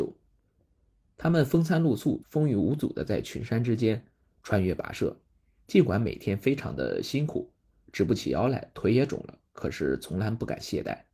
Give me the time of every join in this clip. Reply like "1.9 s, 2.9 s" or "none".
2.2 s